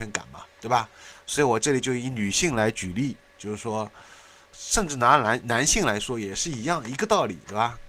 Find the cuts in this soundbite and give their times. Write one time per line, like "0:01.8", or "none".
none